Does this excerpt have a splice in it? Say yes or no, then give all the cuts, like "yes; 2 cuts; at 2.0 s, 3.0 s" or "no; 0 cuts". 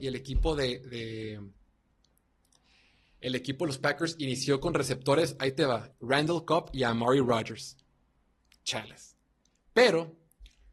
yes; 1 cut; at 5.9 s